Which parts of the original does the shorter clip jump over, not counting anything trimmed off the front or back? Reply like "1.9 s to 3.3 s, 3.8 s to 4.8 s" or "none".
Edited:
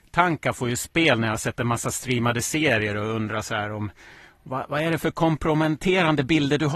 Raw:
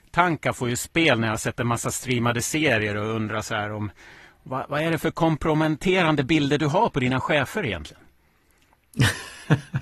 none